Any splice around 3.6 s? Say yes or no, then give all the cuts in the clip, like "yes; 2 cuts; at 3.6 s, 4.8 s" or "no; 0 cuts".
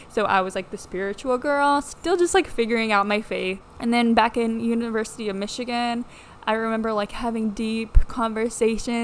yes; 1 cut; at 3.6 s